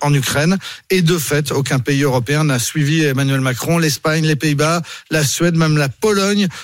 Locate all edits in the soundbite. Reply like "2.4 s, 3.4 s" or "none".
none

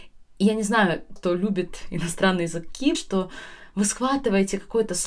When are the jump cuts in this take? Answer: 1.2 s, 2.9 s

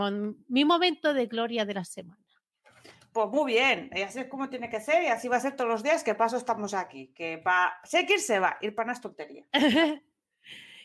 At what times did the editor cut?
none

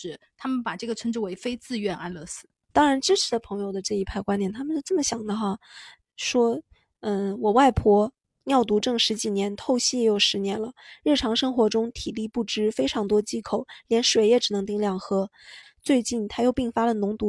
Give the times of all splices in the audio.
2.7 s, 15.6 s

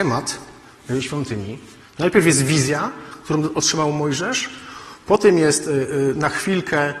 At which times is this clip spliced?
1.8 s

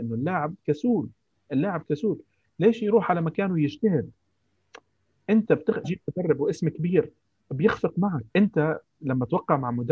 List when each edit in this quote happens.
5.8 s, 8.3 s

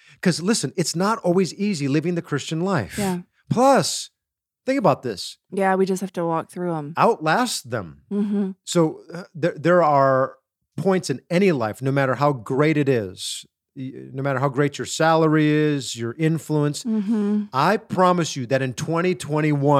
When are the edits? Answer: 5.5 s

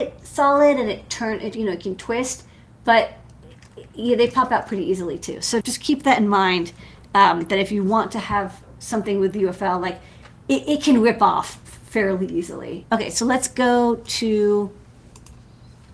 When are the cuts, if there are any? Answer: 5.6 s, 12.8 s

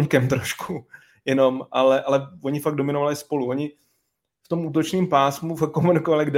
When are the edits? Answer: none

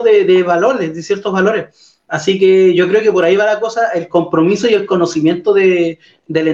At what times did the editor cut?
none

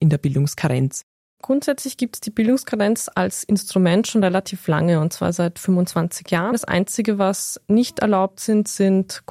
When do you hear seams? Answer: 6.5 s

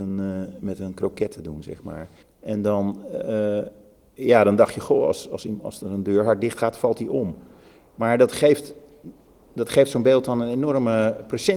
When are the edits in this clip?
2.2 s

